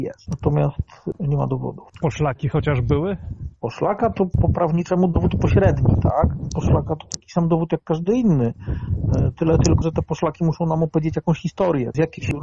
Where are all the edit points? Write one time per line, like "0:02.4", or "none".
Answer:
0:06.5
0:09.8